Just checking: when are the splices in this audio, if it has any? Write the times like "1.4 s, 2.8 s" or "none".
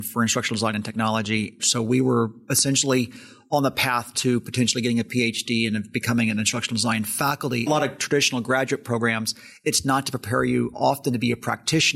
1.6 s, 7.7 s